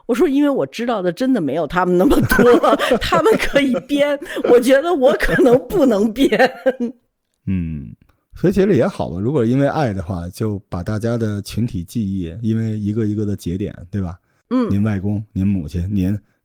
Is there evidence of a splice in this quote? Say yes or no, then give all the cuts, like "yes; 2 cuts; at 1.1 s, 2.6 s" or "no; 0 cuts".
no; 0 cuts